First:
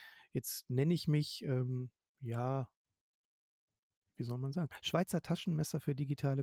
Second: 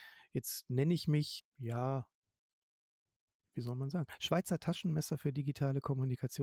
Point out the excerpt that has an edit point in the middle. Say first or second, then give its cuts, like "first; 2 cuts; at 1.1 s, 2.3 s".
second; 1 cut; at 1.4 s